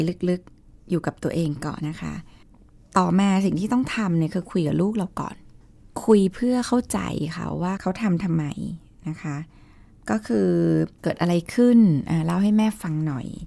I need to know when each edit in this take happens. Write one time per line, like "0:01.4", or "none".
0:01.8
0:11.0